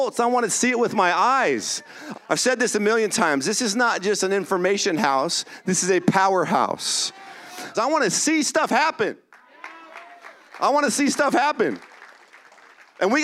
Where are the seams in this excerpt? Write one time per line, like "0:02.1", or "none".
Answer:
0:02.1
0:07.7